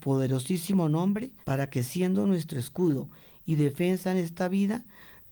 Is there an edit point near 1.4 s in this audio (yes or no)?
yes